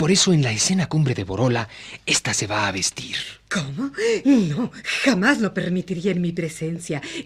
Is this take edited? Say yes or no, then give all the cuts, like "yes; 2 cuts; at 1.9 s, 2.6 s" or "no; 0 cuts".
no; 0 cuts